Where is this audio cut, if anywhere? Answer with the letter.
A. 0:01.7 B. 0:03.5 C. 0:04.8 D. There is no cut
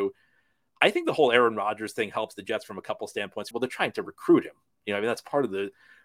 B